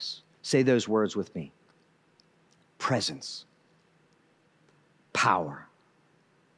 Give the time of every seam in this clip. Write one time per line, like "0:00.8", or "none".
none